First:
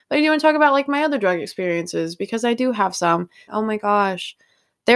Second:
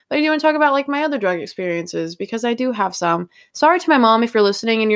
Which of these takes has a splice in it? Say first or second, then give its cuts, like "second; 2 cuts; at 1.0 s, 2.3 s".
first; 1 cut; at 3.5 s